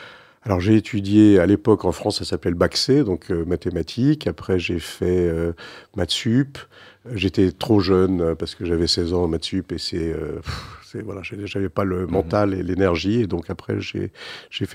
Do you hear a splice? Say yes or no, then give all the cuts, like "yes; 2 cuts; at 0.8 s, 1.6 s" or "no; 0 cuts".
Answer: no; 0 cuts